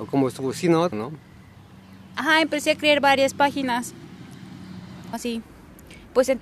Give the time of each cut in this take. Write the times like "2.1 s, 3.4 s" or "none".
0.9 s, 5.1 s